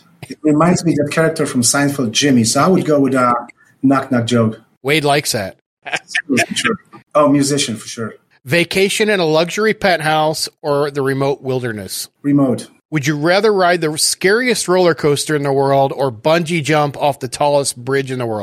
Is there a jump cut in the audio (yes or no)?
yes